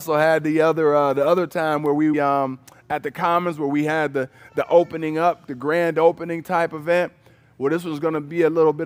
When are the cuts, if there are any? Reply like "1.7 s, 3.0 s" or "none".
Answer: 2.1 s